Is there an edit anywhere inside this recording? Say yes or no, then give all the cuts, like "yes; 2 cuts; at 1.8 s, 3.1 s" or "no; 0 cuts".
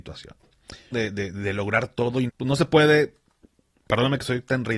yes; 2 cuts; at 0.9 s, 2.3 s